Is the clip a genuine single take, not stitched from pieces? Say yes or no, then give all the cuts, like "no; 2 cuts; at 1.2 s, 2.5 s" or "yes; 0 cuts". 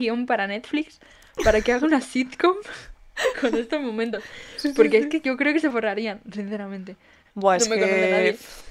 no; 1 cut; at 7.3 s